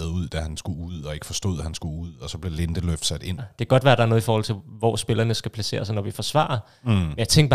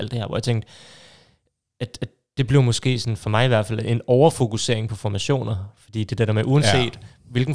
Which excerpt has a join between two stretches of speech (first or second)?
first